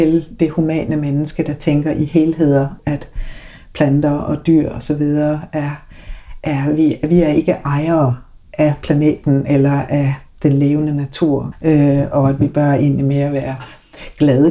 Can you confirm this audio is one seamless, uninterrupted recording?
no; 2 cuts; at 2.8 s, 11.5 s

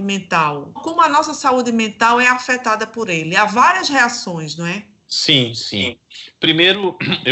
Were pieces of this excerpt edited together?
no; 0 cuts

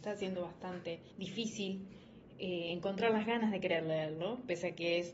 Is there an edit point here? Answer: no; 0 cuts

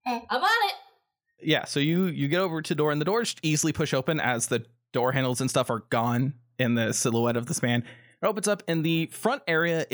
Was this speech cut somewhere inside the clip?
no; 0 cuts

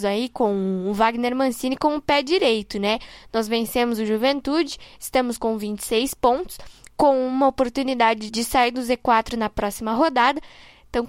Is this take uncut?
no; 1 cut; at 8.3 s

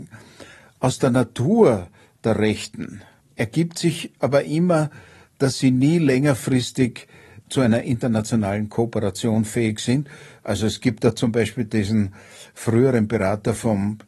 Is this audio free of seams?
no; 1 cut; at 10.4 s

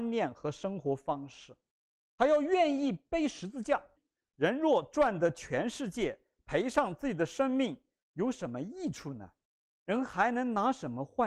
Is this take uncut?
no; 1 cut; at 4.0 s

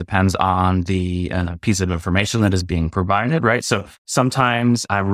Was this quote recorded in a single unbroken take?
yes; 0 cuts

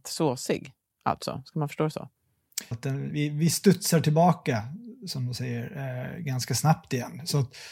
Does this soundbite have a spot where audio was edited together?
yes; 1 cut; at 2.7 s

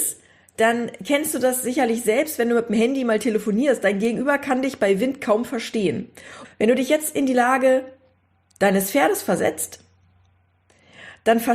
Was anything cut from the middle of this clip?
yes; 1 cut; at 6.4 s

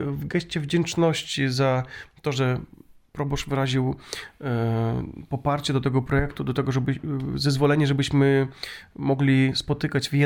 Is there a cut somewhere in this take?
no; 0 cuts

